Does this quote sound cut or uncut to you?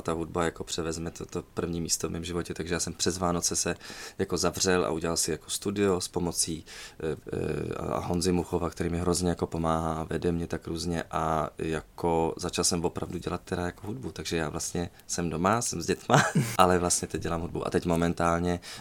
cut